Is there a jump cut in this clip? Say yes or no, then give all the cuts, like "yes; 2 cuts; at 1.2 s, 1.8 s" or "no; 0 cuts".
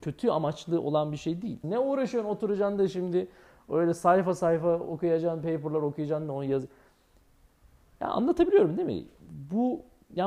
yes; 1 cut; at 1.6 s